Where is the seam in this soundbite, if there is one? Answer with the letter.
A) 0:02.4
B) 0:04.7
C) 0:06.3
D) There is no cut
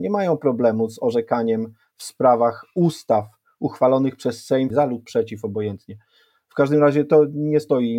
B